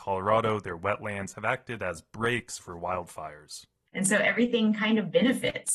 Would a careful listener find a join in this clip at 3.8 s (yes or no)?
no